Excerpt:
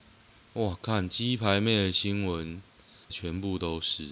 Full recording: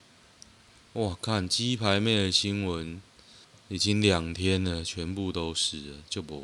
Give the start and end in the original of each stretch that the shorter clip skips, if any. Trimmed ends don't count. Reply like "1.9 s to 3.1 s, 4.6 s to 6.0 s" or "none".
3.5 s to 4.8 s

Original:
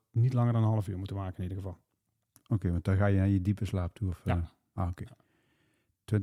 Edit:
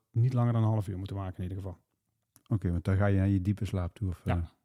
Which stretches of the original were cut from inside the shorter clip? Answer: none

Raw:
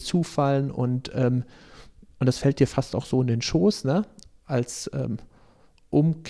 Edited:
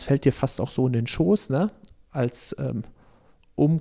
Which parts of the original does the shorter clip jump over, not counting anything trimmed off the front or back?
none

